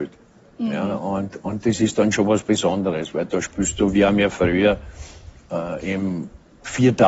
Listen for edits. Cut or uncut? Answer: uncut